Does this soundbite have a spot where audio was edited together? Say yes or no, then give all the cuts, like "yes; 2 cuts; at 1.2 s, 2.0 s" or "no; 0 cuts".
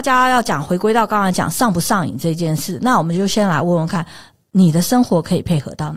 no; 0 cuts